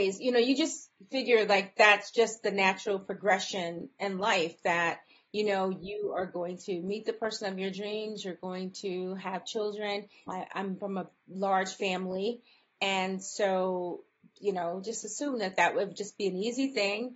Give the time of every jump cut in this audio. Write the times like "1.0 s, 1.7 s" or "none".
10.3 s, 14.4 s